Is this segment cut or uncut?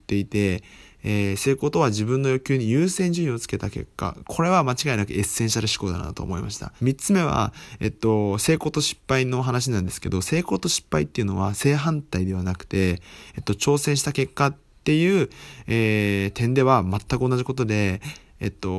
cut